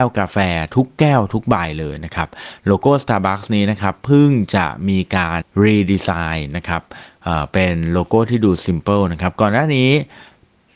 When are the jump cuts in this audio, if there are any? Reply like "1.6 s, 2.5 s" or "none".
5.4 s